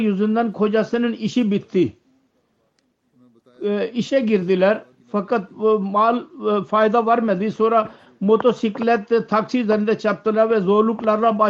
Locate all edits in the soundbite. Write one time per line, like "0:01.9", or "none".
none